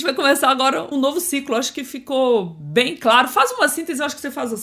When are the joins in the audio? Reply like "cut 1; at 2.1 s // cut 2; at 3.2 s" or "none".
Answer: cut 1; at 0.9 s